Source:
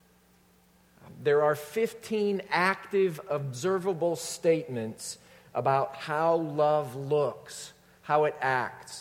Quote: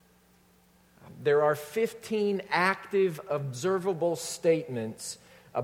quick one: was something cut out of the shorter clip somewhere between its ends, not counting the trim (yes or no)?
no